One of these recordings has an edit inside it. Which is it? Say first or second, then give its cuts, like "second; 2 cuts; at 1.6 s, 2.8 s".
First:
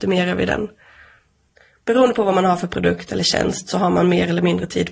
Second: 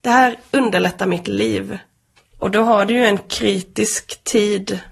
second; 1 cut; at 2.2 s